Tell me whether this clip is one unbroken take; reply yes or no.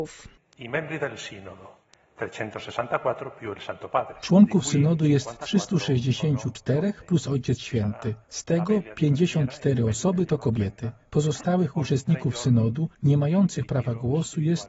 yes